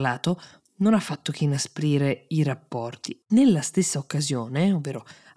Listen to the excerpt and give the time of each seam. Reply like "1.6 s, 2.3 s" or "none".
3.2 s